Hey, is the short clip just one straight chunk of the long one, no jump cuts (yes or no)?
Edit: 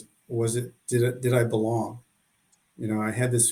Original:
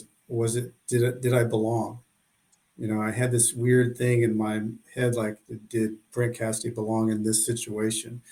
yes